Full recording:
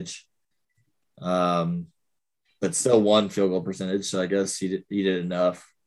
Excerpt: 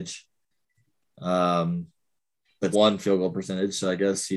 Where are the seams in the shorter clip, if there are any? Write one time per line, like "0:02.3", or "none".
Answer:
0:02.7